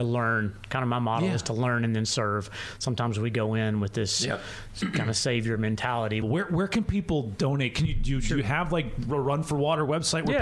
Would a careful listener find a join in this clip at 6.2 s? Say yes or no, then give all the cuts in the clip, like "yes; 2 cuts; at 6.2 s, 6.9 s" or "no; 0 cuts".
yes; 1 cut; at 6.2 s